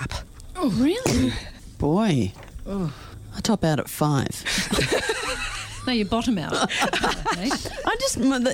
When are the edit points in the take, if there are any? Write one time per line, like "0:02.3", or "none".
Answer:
none

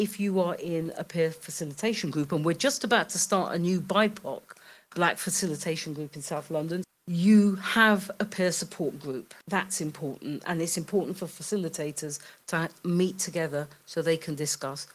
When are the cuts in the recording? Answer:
0:06.8
0:09.4

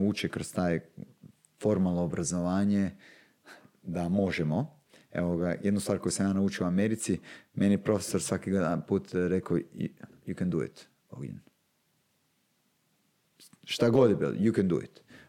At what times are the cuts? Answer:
none

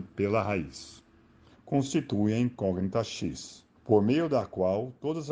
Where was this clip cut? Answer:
0:01.5
0:03.8

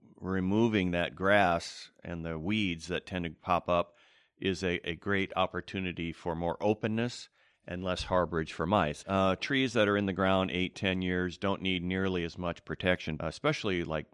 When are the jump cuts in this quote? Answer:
0:09.0
0:13.2

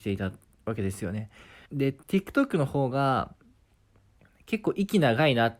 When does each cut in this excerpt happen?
0:01.6

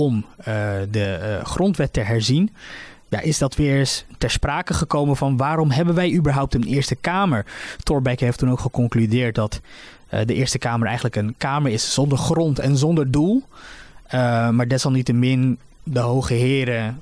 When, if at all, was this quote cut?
none

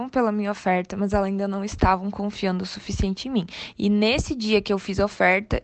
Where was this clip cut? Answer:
0:03.7

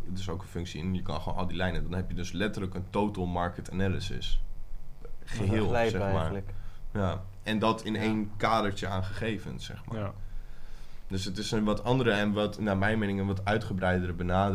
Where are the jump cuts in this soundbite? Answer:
none

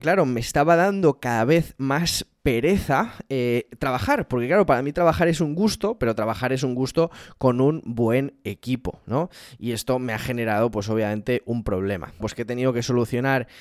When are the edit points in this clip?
0:12.2

